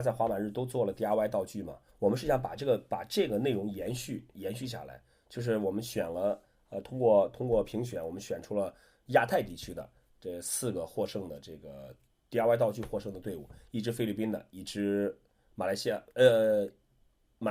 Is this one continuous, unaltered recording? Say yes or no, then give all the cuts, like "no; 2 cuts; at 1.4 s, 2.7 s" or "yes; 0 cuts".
yes; 0 cuts